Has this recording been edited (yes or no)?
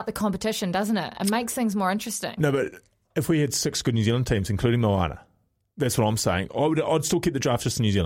no